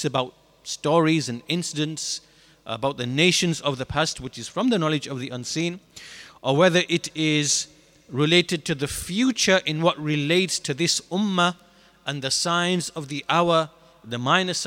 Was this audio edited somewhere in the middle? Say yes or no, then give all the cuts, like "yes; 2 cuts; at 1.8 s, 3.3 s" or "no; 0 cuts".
no; 0 cuts